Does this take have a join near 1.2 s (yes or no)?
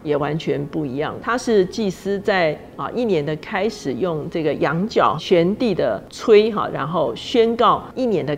yes